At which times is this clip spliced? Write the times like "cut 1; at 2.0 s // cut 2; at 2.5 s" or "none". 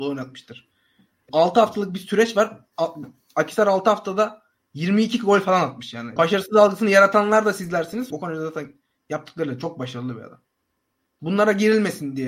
cut 1; at 1.3 s // cut 2; at 6.2 s // cut 3; at 8.1 s